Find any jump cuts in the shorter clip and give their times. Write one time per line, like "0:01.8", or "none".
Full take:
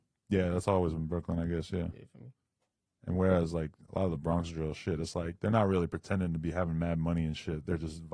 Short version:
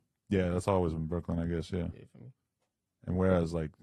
none